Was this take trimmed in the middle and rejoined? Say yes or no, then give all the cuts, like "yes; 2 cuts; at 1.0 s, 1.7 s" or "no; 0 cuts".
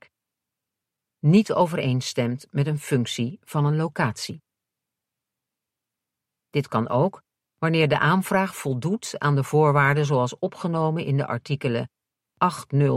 yes; 1 cut; at 6.3 s